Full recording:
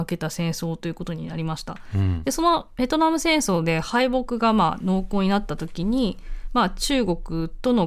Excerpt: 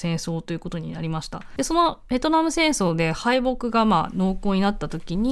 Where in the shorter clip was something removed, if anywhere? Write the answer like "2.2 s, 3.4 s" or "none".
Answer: 1.6 s